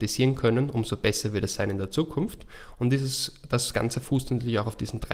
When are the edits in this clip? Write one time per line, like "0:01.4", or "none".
none